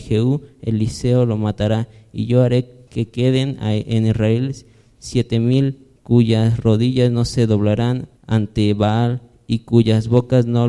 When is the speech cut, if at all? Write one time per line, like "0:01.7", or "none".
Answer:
0:02.9
0:06.0
0:08.2